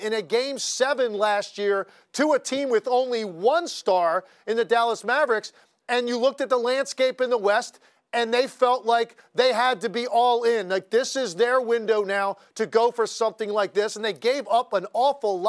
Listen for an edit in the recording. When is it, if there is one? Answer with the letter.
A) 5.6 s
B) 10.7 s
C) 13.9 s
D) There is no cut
D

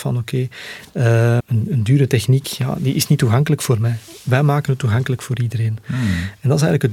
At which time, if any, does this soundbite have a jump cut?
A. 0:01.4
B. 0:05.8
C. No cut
A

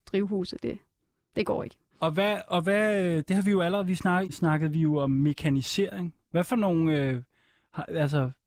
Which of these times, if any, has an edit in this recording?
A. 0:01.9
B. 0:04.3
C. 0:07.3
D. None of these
B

